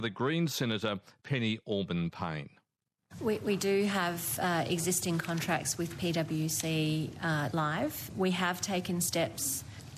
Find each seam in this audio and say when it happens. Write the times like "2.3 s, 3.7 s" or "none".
3.2 s, 7.5 s